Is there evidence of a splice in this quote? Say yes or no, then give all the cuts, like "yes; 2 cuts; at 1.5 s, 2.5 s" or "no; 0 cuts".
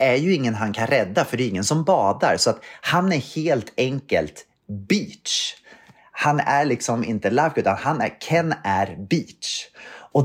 no; 0 cuts